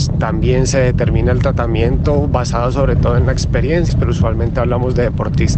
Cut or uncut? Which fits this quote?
cut